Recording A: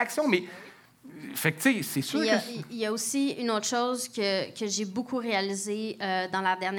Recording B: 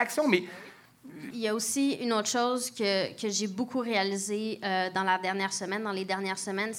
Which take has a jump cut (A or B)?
B